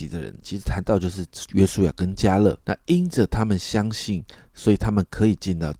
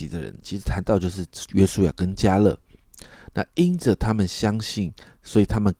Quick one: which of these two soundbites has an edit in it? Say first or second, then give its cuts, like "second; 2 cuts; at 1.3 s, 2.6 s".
first; 1 cut; at 2.6 s